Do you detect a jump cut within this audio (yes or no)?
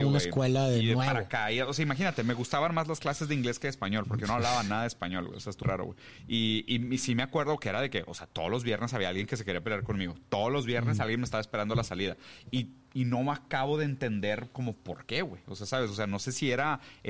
yes